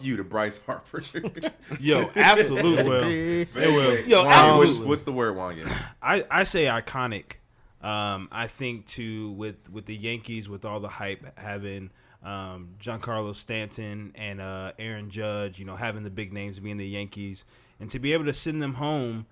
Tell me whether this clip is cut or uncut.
uncut